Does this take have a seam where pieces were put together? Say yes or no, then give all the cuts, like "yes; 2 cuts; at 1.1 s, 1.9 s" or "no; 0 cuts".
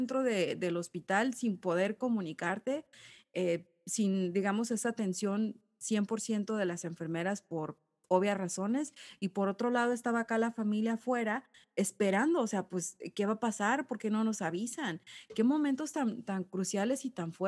no; 0 cuts